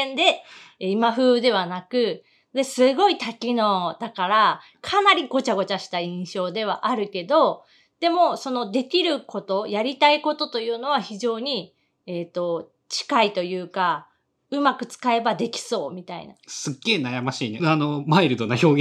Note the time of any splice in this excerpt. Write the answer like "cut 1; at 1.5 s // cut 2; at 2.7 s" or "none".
cut 1; at 17.6 s